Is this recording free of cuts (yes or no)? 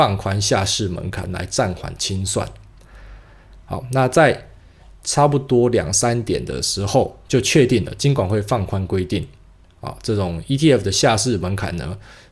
no